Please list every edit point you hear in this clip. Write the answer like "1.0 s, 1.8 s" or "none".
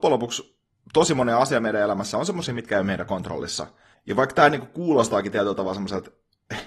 3.9 s